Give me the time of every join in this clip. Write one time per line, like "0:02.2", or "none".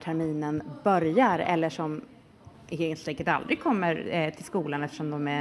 none